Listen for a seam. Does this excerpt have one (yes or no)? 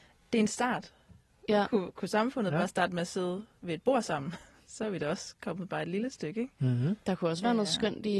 no